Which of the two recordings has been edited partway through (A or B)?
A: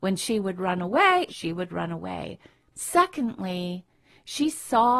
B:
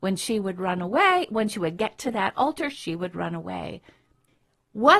A